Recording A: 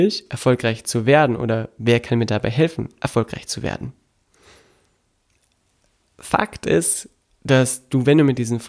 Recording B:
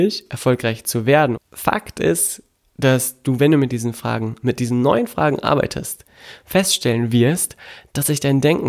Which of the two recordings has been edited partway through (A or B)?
B